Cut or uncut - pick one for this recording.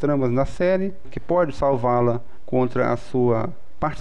cut